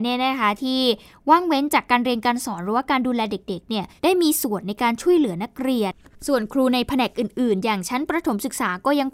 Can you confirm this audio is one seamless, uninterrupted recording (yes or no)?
no